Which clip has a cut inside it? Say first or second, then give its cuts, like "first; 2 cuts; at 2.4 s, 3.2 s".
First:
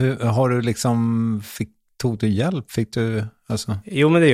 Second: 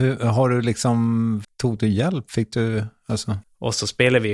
second; 2 cuts; at 1.4 s, 3.4 s